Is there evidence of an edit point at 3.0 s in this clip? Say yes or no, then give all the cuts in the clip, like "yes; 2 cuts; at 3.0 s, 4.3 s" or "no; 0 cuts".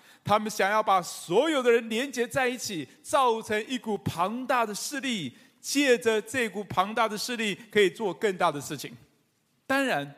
no; 0 cuts